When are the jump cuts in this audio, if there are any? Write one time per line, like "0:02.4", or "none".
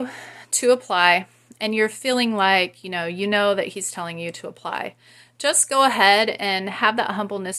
none

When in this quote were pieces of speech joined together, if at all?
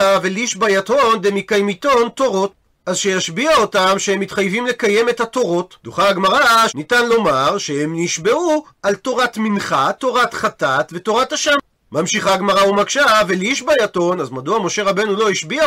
0:06.7

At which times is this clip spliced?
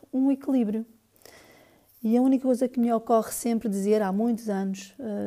none

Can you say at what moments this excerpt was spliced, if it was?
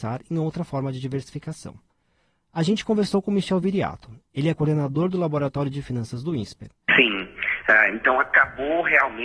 0:06.9

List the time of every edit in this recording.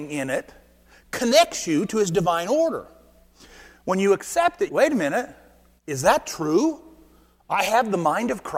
0:04.7

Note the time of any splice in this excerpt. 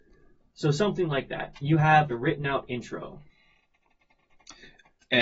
0:02.1

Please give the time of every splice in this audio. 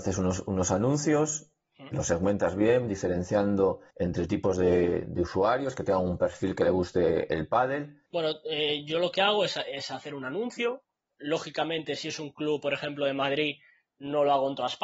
0:03.9
0:08.1

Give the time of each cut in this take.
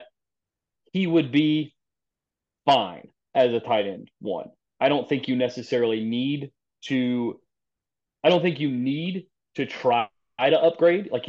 none

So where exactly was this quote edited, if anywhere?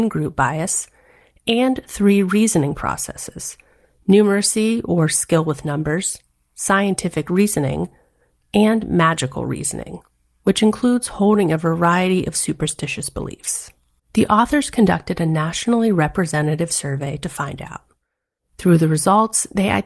0:14.0

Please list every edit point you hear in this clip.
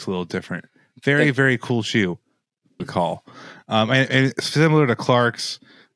0:02.8

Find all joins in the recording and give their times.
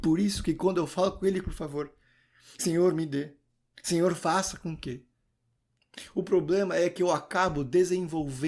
0:01.4

